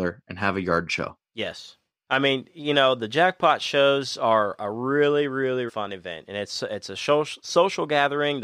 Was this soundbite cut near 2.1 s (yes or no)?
yes